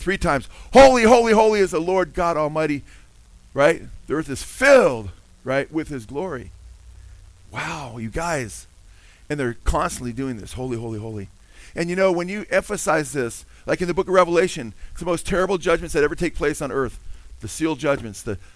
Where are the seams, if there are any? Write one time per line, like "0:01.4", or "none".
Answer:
none